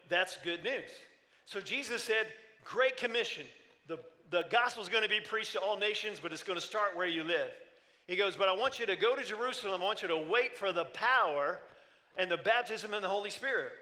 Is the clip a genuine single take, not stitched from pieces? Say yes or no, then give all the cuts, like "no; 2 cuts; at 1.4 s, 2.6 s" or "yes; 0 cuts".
yes; 0 cuts